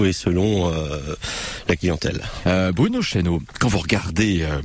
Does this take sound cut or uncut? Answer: cut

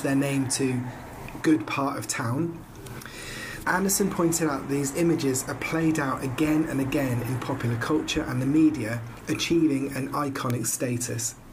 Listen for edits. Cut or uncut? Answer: cut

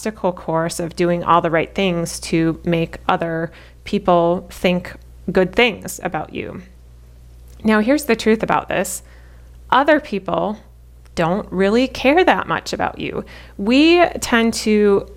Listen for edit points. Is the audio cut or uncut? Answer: uncut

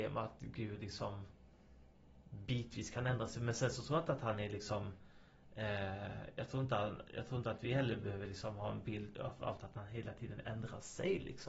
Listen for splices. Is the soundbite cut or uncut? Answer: uncut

